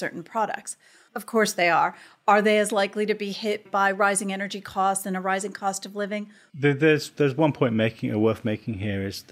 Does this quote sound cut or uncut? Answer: cut